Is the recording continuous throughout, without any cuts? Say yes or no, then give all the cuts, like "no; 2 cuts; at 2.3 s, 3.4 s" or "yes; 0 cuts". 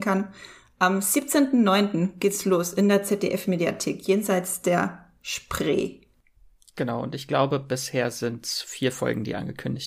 yes; 0 cuts